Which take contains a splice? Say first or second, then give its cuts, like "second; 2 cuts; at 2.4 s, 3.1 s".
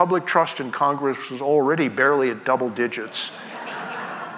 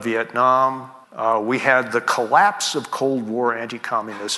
second; 1 cut; at 1.0 s